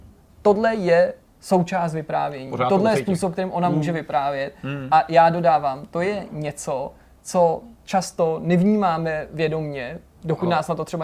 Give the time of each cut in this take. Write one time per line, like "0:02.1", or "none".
none